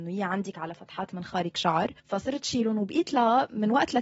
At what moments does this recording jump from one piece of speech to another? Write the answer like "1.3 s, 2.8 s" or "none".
2.0 s